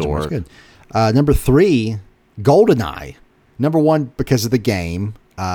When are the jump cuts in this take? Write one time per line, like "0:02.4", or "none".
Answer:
none

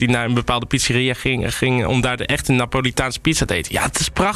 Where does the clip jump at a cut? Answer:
none

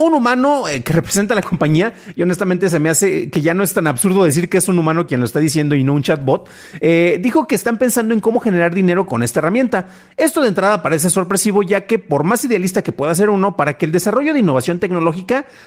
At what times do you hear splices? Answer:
none

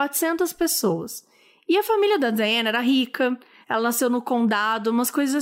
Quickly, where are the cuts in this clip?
0:03.6

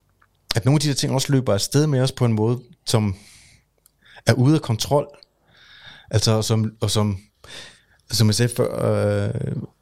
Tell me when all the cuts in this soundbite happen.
none

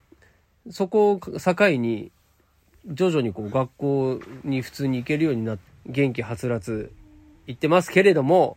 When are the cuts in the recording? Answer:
0:05.7

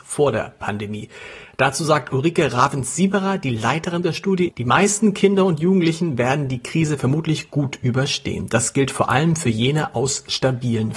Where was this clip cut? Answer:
0:04.5

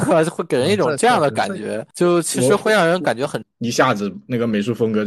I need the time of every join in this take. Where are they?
0:03.4

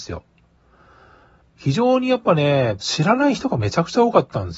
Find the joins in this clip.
0:01.4
0:02.8

